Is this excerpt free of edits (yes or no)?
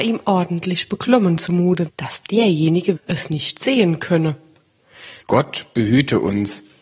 no